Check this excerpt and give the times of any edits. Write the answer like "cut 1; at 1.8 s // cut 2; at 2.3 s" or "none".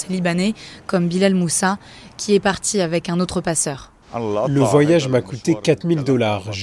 cut 1; at 4.0 s